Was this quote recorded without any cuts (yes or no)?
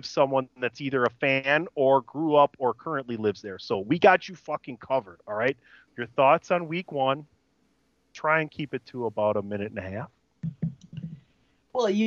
no